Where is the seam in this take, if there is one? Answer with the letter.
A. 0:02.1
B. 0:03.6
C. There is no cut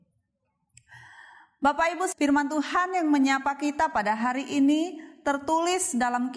A